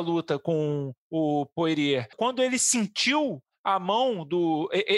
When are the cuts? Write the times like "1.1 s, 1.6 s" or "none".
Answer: 2.1 s